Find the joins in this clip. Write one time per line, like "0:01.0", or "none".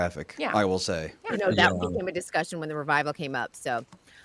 0:01.3